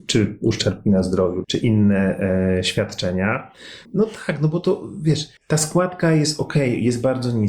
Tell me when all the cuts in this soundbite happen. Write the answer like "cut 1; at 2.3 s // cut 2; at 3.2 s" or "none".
cut 1; at 1.4 s // cut 2; at 3.8 s // cut 3; at 5.4 s